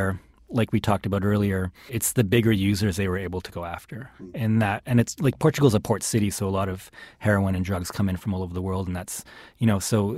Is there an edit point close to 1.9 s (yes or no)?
yes